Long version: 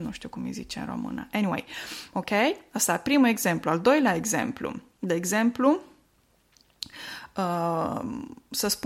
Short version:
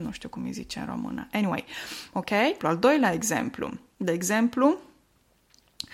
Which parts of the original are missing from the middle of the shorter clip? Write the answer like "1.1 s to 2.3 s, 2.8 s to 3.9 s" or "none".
2.6 s to 3.6 s